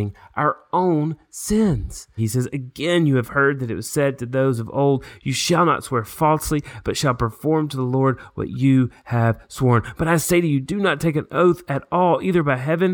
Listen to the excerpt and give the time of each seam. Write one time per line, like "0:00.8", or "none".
0:02.2